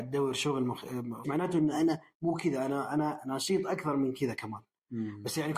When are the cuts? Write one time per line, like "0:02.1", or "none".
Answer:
0:01.2